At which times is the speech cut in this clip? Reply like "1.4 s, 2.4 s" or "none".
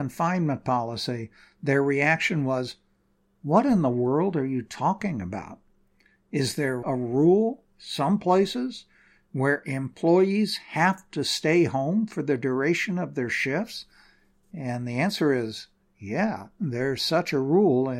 6.8 s